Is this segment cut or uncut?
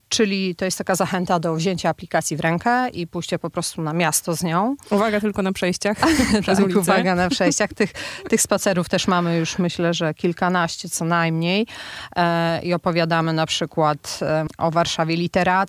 uncut